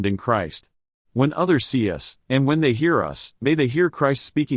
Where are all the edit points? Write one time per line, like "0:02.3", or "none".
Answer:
0:01.0
0:02.2